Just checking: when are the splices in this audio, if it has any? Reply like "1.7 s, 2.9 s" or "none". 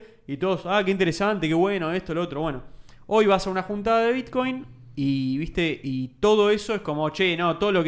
none

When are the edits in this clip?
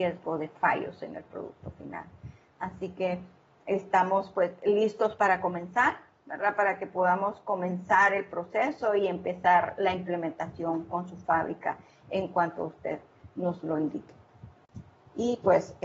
none

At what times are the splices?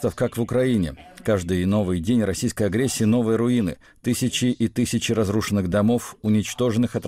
none

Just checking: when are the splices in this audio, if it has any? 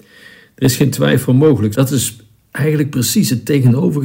1.7 s

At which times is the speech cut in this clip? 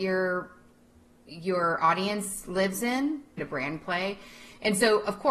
3.4 s

